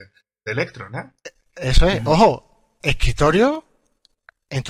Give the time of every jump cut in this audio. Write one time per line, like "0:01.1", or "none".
none